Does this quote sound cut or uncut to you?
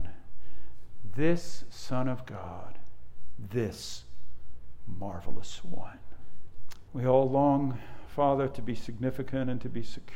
cut